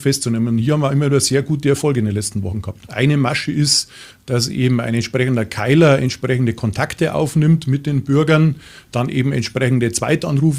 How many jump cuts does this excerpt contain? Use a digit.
1